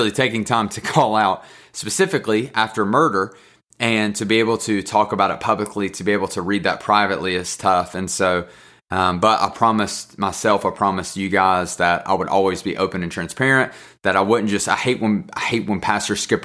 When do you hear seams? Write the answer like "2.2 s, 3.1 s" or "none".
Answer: none